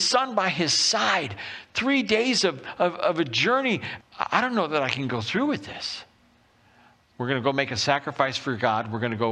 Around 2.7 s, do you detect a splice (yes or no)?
no